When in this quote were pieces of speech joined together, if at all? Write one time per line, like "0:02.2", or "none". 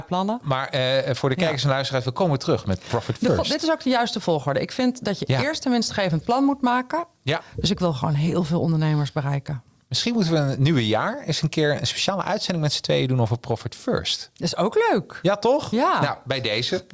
0:07.4